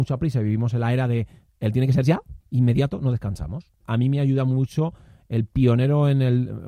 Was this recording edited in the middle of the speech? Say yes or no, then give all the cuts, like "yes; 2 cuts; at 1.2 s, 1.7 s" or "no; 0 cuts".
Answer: yes; 2 cuts; at 2.4 s, 3.8 s